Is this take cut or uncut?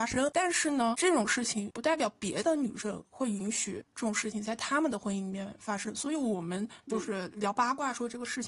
uncut